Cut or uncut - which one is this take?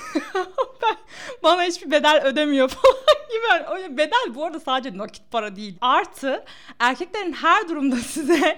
cut